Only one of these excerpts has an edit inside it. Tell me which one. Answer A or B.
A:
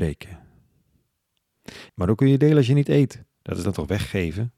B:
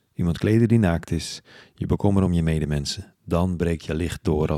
A